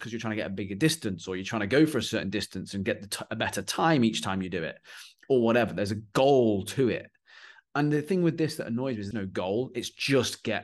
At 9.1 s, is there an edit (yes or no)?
yes